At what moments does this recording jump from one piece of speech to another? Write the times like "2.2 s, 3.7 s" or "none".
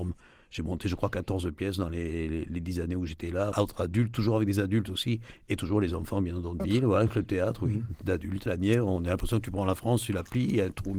3.5 s, 6.6 s, 8.5 s